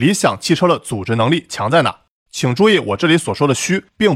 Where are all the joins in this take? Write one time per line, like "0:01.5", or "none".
0:02.3